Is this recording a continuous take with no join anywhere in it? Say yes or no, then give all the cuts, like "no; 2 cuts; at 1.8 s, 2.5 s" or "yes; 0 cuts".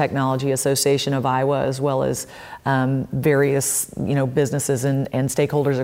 yes; 0 cuts